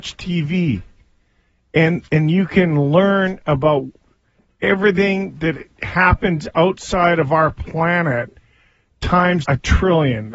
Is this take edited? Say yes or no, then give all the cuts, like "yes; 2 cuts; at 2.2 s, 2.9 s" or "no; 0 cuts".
yes; 2 cuts; at 2.1 s, 9.4 s